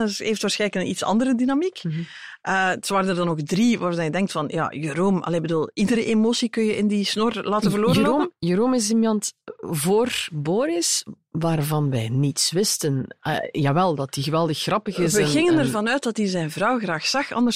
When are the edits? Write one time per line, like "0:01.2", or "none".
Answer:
none